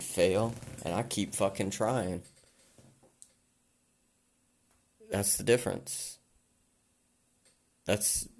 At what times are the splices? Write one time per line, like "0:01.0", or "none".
none